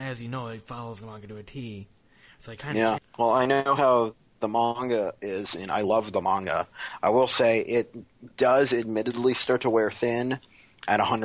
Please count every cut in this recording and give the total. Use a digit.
1